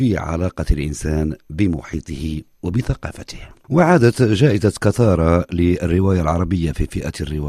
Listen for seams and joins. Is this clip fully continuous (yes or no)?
no